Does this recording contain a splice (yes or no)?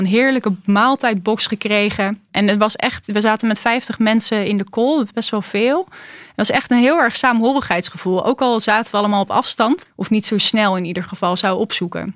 yes